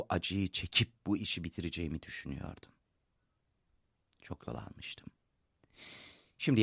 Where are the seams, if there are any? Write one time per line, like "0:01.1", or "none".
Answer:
none